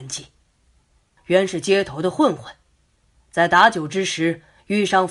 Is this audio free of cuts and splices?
no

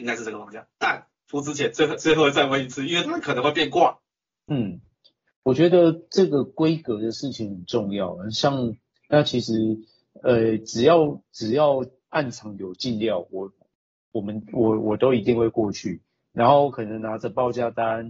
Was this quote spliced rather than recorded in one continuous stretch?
yes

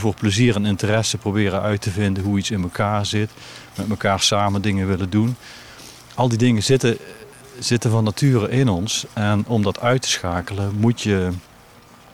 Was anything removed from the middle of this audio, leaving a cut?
no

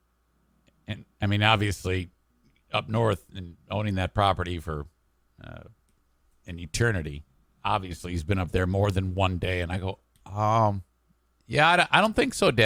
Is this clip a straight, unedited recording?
yes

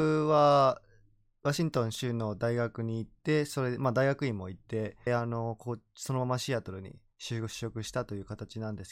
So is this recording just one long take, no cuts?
no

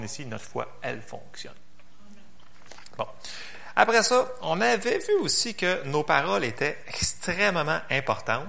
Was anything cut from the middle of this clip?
no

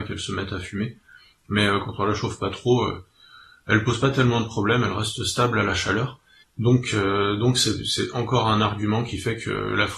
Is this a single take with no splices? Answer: no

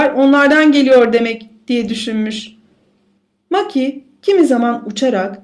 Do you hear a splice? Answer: no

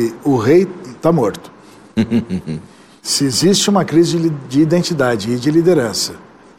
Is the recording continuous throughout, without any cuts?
yes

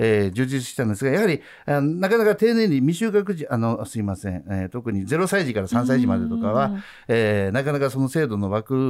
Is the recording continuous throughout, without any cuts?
yes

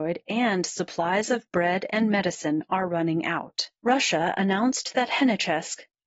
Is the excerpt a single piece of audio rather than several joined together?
no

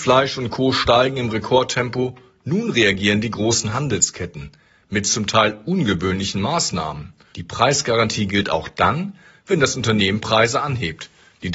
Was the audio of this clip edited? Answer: yes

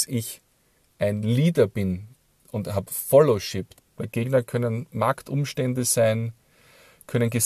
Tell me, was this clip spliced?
yes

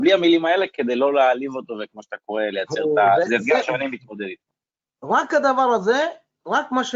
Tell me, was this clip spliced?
no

